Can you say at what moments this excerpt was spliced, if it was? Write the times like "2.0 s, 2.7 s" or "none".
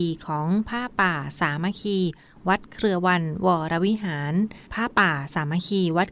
4.7 s